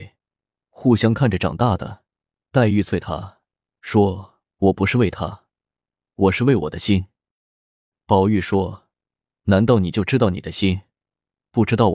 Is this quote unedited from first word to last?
no; 1 cut; at 2.4 s

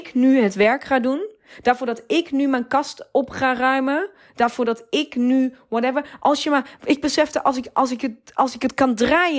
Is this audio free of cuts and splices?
yes; 0 cuts

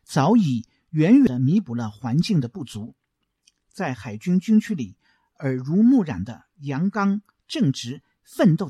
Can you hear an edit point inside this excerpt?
no; 0 cuts

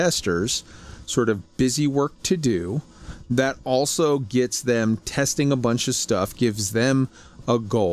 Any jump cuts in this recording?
yes; 1 cut; at 6.3 s

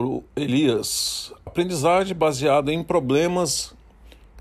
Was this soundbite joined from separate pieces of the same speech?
yes; 1 cut; at 1.5 s

